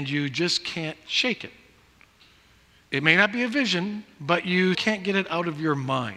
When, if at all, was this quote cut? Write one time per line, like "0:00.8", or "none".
0:04.7